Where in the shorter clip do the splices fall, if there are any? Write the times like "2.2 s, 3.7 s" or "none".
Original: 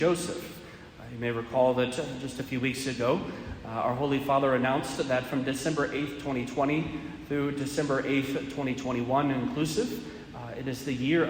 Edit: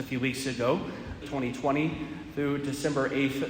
1.2 s